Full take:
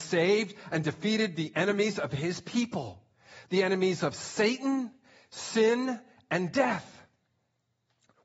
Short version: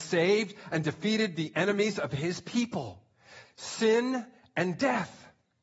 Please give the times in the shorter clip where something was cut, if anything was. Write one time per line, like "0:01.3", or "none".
0:03.4

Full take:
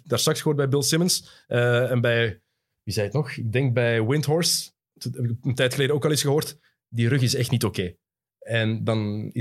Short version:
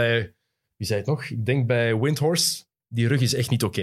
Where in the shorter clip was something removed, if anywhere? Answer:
0:02.8

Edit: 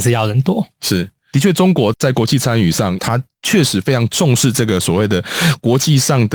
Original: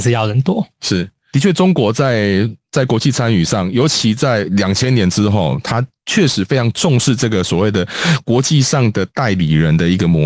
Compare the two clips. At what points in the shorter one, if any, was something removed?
0:01.9
0:03.0

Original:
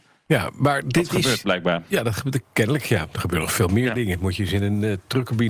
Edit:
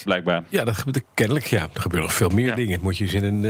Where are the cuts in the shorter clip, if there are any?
none

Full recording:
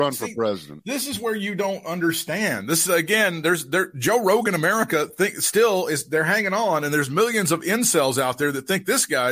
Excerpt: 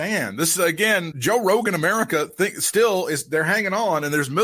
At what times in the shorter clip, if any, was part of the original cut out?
0:01.1

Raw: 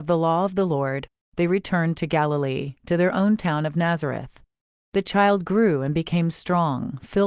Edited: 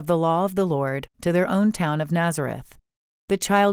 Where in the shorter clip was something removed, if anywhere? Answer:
0:01.1

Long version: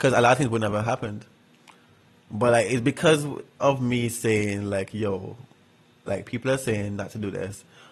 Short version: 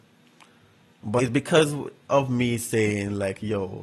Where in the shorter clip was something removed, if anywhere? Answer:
0:01.2

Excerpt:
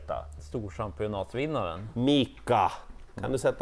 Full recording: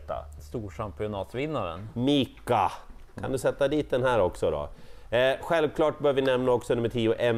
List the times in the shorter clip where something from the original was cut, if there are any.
none

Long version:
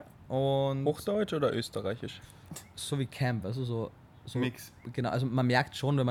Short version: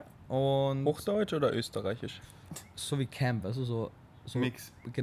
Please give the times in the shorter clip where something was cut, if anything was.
none

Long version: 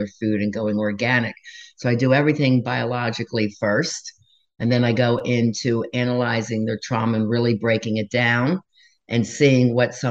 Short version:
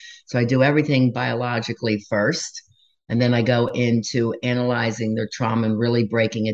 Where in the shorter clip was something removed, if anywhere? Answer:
none

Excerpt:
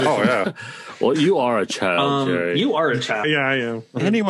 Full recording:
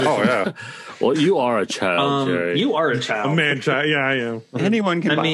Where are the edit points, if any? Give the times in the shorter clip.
0:03.2

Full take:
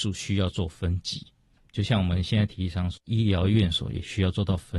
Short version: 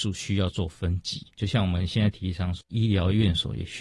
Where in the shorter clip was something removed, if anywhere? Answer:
0:01.3

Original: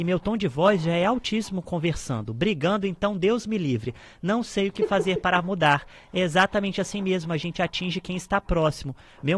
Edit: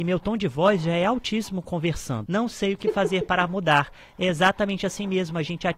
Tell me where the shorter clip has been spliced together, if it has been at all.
0:02.3

